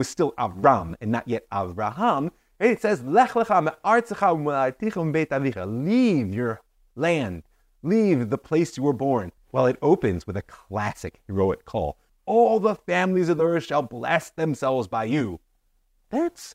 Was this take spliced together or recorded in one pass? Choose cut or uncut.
cut